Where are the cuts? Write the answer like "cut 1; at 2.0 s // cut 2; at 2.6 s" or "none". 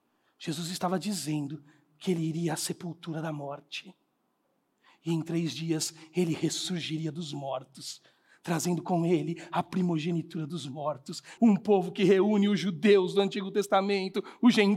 cut 1; at 11.4 s